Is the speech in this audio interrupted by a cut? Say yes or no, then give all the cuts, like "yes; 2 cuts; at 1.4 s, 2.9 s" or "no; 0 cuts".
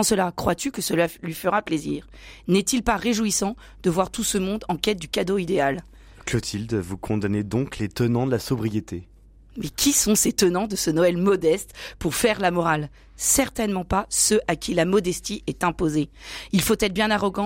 no; 0 cuts